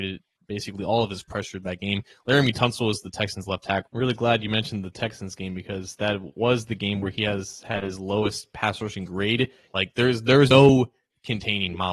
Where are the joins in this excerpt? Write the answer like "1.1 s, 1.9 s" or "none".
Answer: 3.9 s, 9.7 s